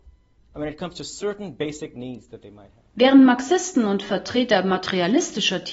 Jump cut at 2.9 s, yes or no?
yes